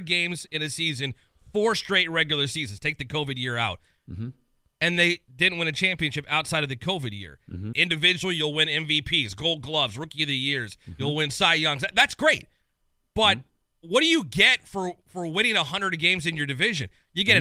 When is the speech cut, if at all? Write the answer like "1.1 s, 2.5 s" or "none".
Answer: 7.7 s

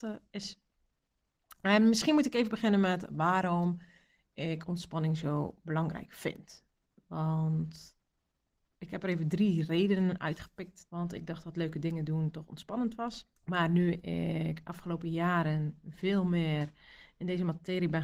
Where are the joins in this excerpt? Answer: 10.9 s, 13.4 s

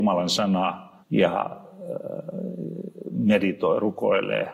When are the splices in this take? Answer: 1.0 s

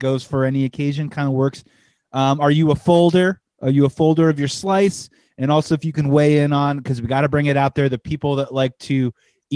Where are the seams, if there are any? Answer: 3.5 s

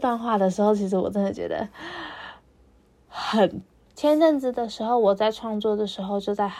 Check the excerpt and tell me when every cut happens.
3.9 s

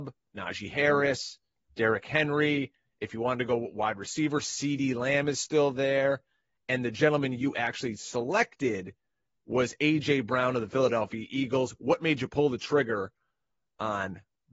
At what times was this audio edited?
none

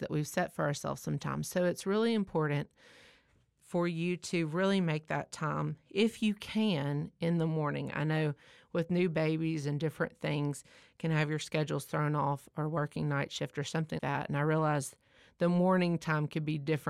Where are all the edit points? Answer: 14.0 s

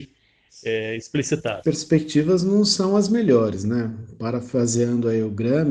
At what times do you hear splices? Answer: 1.6 s

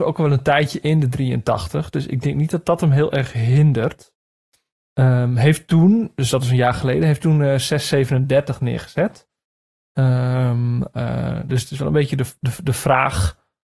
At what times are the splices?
none

